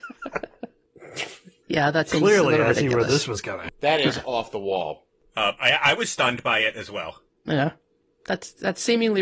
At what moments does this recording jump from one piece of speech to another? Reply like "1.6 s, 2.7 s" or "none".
3.7 s